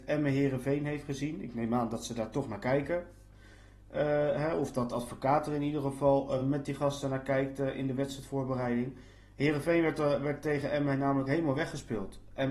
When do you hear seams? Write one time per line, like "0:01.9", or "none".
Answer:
none